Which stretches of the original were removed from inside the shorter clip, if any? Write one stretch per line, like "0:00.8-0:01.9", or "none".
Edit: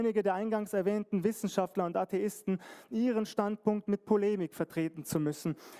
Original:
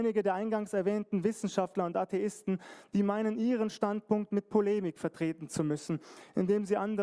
0:02.9-0:03.3

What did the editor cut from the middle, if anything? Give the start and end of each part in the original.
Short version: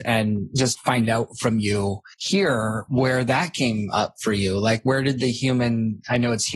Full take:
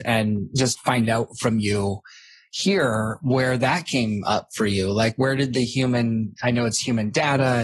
0:02.1-0:02.5

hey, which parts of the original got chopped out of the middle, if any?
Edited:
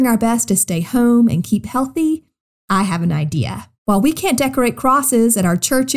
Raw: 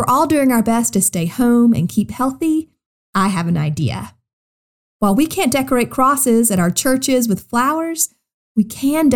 0:04.2-0:04.9

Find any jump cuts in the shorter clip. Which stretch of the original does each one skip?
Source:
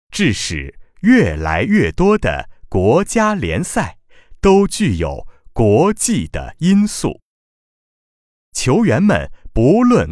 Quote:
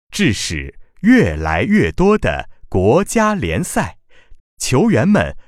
0:04.4-0:08.3

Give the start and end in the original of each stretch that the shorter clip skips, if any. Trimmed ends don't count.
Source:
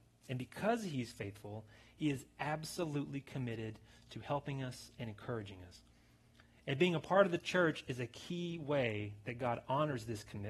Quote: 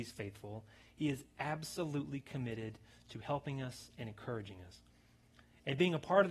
none

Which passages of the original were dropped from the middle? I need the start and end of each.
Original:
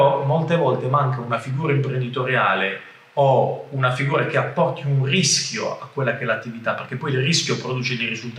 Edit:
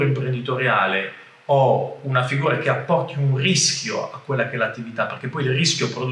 none

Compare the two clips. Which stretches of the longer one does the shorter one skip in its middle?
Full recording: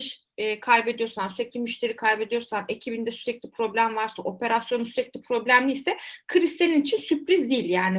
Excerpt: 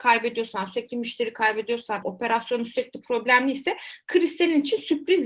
0:02.7-0:04.2

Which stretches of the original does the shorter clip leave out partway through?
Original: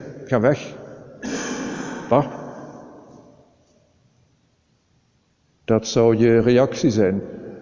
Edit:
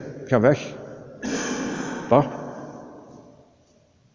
none

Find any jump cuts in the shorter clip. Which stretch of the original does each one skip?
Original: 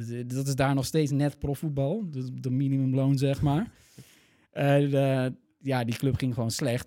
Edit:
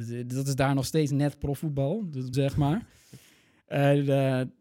0:02.3-0:03.2

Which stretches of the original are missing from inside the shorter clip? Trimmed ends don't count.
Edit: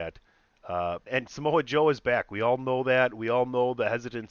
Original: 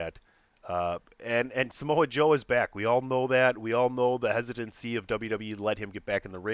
0:01.1-0:01.5

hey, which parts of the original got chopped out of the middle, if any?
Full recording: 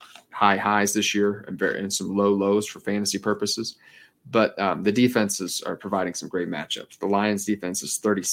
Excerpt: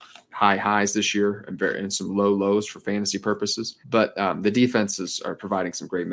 0:03.8-0:04.2

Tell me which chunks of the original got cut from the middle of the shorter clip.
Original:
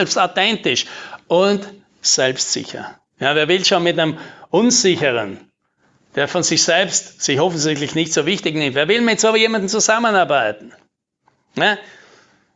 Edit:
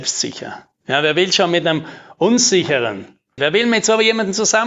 0:05.7-0:08.7

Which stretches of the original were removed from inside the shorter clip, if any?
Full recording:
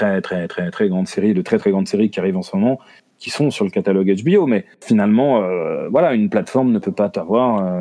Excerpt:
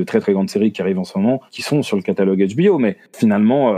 0:02.8-0:03.1

